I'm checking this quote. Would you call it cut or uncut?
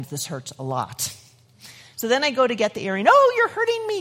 cut